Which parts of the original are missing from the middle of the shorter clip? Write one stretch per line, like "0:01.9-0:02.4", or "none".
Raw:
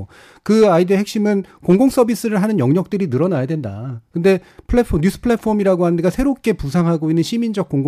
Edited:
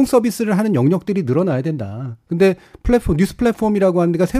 none